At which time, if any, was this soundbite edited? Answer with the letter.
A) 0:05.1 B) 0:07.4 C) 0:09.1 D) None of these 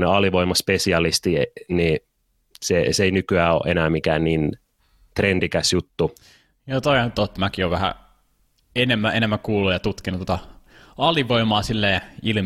B